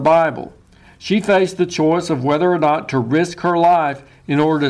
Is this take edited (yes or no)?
no